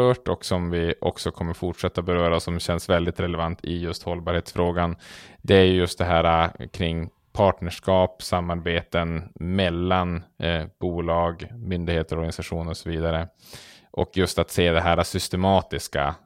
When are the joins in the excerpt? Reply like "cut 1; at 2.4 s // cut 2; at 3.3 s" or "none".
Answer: cut 1; at 11.5 s

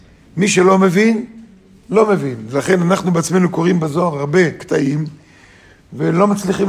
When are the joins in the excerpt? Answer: none

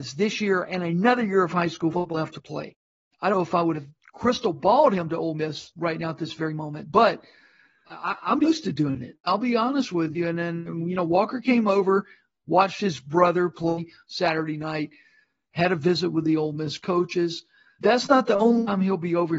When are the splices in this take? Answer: none

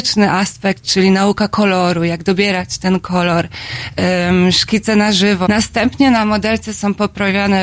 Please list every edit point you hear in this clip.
cut 1; at 5.5 s

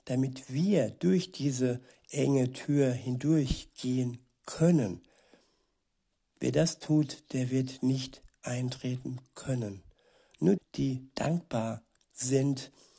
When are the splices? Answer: cut 1; at 10.6 s

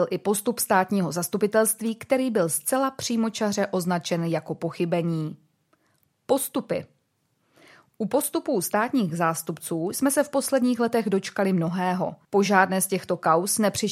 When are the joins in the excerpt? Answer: cut 1; at 12.2 s

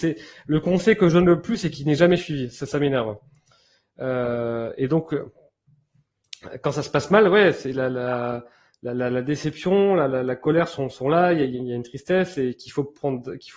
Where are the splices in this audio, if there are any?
none

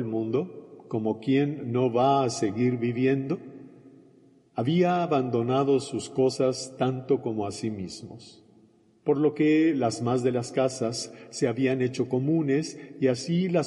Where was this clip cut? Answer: none

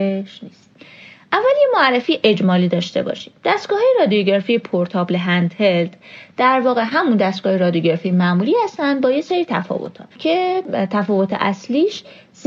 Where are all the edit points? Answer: cut 1; at 10.1 s

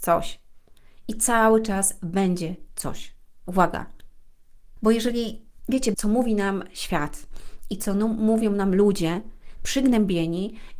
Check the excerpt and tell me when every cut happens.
cut 1; at 4.8 s // cut 2; at 5.9 s // cut 3; at 9.6 s

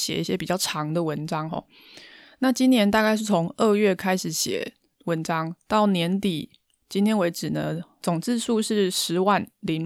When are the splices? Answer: cut 1; at 8.0 s

